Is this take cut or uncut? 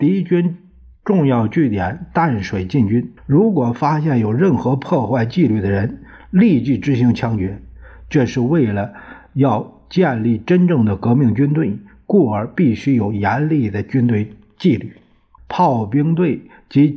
cut